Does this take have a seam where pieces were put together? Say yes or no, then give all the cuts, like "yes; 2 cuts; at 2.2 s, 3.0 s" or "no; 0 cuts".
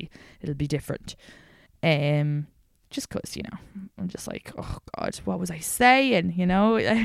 yes; 1 cut; at 1.7 s